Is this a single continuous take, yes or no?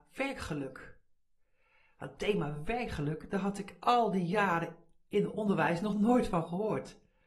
yes